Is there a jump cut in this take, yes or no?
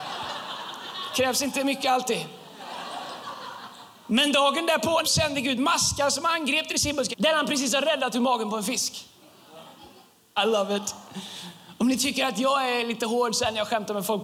yes